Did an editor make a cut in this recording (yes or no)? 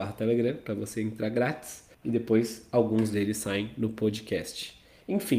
yes